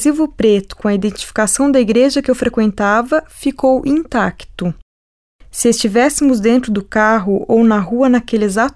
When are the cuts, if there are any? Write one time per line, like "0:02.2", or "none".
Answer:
0:05.3